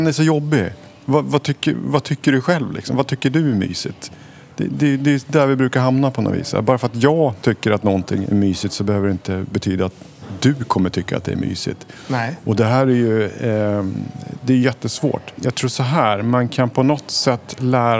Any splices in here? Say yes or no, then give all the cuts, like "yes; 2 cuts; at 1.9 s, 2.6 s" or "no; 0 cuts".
yes; 2 cuts; at 8.2 s, 15.4 s